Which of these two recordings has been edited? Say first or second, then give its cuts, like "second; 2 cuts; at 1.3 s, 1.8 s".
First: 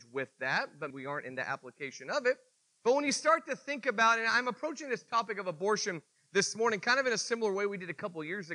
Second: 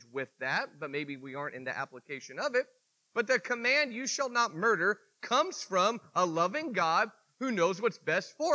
first; 2 cuts; at 0.9 s, 2.8 s